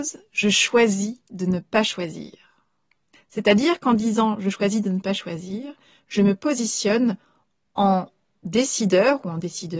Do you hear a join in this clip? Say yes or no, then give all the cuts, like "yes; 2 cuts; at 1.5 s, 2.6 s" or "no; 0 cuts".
yes; 1 cut; at 3.1 s